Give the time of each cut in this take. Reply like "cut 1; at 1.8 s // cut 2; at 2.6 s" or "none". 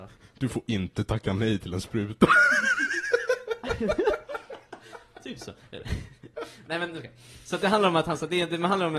none